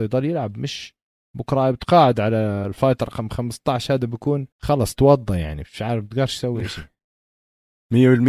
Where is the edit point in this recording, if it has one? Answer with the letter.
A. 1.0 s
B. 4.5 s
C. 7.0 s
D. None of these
B